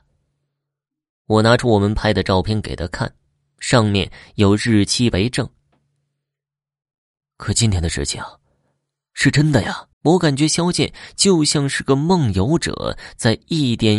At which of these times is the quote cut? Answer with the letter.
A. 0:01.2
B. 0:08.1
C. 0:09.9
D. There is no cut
C